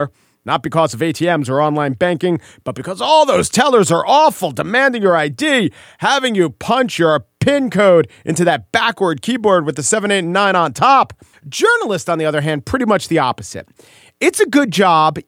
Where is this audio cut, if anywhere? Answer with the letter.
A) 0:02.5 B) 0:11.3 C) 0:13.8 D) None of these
B